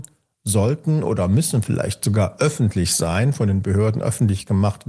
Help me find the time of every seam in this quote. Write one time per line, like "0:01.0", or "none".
none